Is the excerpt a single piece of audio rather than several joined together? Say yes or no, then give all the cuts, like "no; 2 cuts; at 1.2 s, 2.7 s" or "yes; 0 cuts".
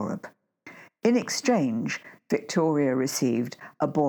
yes; 0 cuts